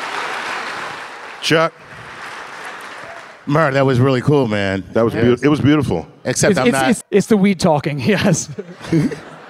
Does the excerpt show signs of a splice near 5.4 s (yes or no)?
no